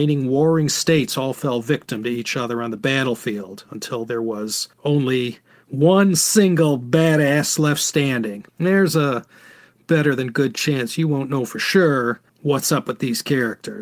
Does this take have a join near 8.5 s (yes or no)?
yes